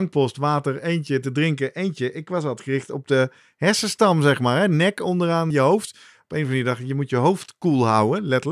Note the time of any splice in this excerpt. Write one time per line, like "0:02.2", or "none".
0:05.5